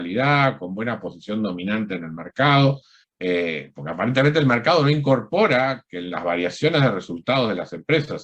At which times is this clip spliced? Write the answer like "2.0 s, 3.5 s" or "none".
3.0 s